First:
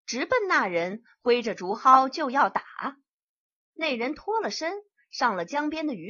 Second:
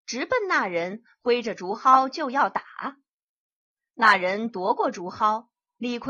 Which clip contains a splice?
first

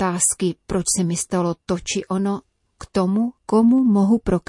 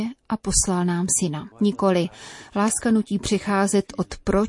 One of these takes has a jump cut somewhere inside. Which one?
second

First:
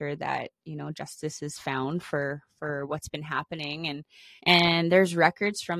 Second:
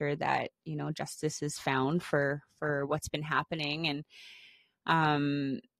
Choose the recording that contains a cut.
first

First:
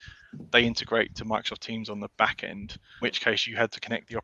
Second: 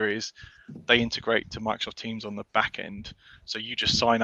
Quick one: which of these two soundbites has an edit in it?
first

